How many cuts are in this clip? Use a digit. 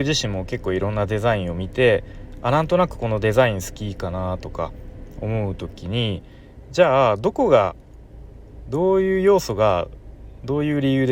0